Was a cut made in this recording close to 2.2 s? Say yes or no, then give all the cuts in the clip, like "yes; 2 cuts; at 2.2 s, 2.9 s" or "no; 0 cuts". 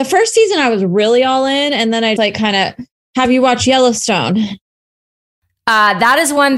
yes; 1 cut; at 2.2 s